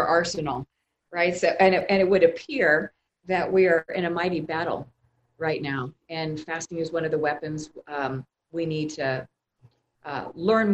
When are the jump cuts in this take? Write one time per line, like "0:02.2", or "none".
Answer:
none